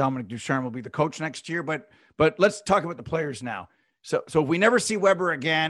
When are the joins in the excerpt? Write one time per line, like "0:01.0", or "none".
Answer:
0:03.9